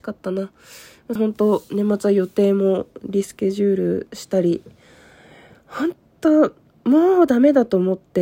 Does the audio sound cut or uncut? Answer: cut